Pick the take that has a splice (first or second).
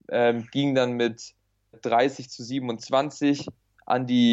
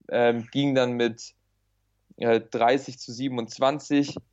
first